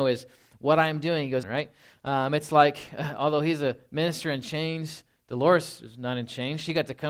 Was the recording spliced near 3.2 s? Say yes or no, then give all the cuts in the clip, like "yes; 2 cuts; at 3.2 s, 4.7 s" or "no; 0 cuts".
no; 1 cut; at 1.4 s